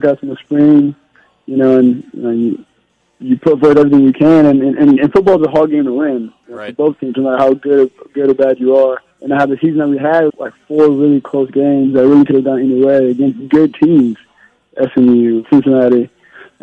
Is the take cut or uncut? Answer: cut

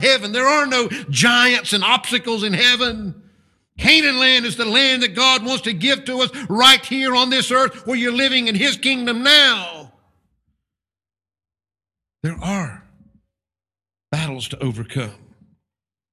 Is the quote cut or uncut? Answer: uncut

